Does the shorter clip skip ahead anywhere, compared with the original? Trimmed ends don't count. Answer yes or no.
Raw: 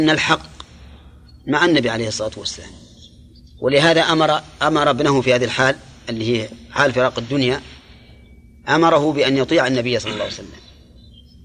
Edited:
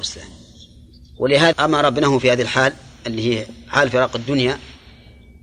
yes